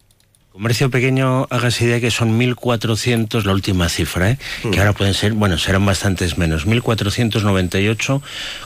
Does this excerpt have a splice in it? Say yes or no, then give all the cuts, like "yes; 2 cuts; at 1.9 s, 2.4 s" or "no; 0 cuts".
no; 0 cuts